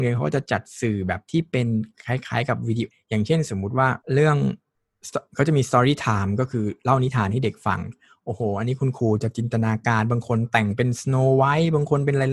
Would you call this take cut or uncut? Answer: cut